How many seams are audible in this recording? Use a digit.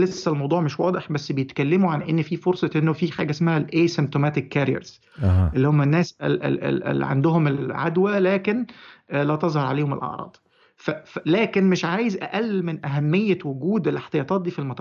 0